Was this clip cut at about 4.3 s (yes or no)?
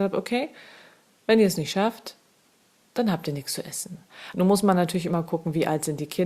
yes